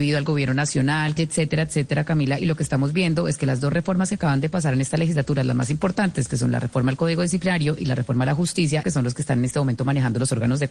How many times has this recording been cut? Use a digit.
2